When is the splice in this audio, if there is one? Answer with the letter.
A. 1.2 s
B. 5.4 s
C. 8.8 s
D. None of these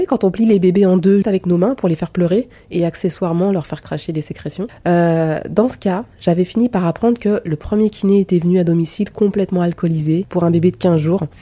A